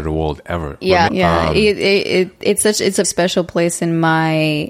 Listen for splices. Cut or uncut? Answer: cut